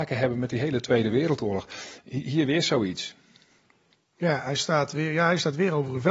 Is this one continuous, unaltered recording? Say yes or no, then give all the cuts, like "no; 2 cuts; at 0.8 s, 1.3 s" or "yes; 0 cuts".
yes; 0 cuts